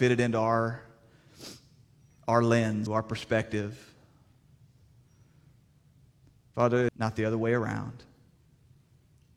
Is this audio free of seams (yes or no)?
no